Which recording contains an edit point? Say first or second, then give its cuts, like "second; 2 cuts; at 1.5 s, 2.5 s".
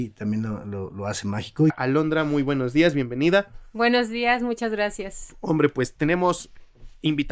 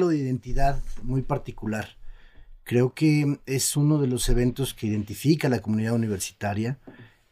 first; 1 cut; at 1.7 s